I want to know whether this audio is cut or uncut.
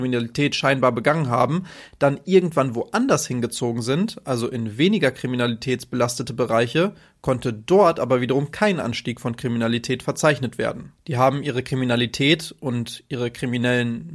uncut